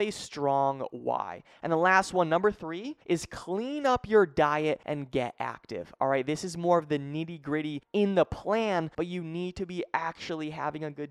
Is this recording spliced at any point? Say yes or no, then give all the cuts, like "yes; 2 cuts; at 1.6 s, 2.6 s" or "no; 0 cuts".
no; 0 cuts